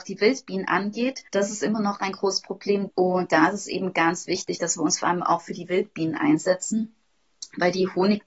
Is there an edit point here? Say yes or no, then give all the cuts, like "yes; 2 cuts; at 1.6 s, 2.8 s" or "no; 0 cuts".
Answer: yes; 2 cuts; at 1.3 s, 2.9 s